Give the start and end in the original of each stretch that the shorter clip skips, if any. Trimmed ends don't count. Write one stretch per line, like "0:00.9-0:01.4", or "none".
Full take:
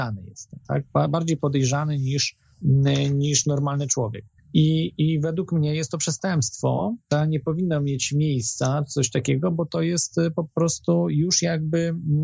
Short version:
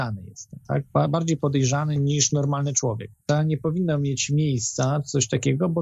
0:02.0-0:03.1
0:04.3-0:07.0